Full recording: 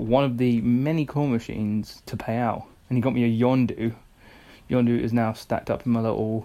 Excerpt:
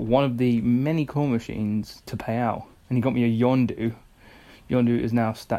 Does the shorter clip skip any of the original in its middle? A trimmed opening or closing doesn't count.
no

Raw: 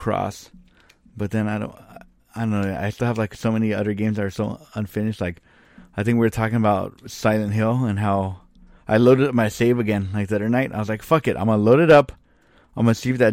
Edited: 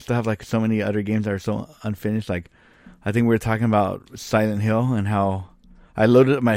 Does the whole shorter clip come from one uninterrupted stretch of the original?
yes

